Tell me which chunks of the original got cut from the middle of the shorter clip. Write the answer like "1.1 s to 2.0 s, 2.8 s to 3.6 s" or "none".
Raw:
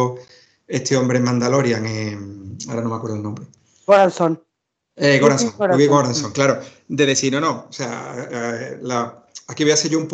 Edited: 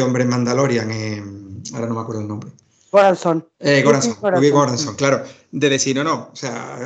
4.5 s to 4.9 s